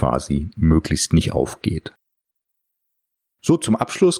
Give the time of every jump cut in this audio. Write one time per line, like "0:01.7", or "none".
none